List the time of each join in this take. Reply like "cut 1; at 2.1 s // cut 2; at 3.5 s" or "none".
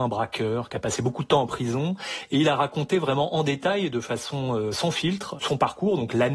none